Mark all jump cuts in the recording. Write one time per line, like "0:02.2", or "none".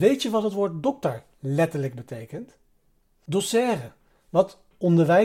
0:03.3